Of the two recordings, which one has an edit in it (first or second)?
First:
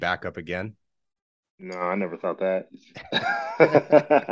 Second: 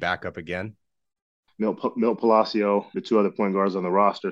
second